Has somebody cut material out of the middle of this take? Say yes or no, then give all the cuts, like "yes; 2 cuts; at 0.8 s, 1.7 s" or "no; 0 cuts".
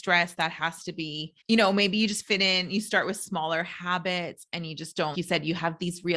yes; 2 cuts; at 1.4 s, 5.1 s